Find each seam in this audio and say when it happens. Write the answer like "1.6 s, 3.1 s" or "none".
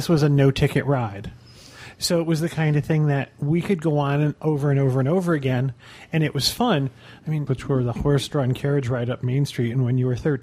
7.5 s